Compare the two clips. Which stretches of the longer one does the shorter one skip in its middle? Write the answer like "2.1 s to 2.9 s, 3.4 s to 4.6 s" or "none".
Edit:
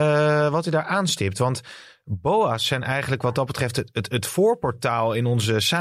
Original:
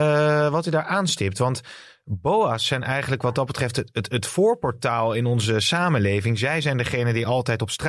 none

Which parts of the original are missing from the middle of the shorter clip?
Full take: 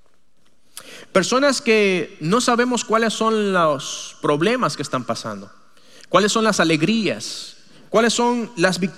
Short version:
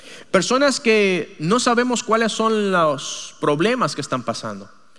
none

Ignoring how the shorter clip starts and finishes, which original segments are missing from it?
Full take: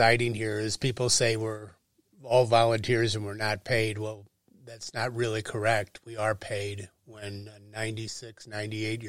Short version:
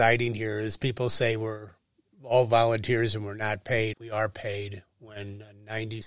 3.9 s to 6.0 s

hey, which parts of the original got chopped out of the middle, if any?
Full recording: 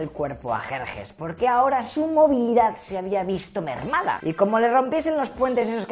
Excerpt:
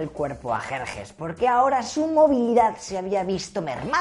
none

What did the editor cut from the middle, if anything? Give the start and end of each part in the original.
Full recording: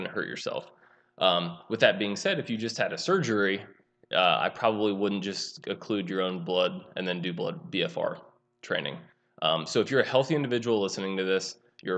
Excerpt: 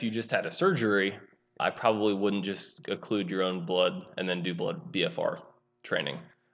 4.1 s to 4.4 s

